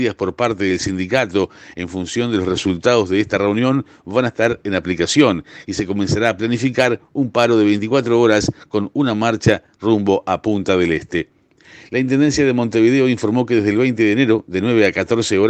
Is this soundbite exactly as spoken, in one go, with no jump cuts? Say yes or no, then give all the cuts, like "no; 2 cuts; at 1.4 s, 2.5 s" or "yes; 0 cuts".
yes; 0 cuts